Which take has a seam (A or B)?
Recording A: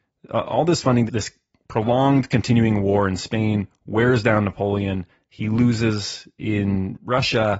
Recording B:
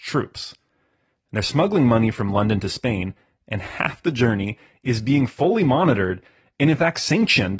A